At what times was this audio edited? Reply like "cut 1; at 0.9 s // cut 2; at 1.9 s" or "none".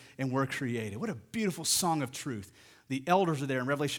none